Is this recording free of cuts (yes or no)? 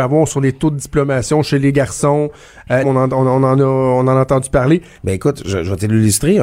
no